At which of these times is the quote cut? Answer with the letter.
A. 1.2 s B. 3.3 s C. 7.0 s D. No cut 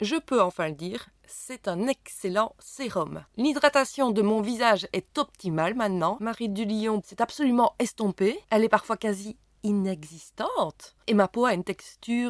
C